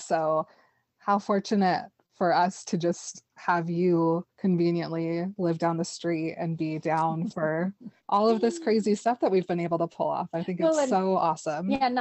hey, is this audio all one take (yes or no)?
no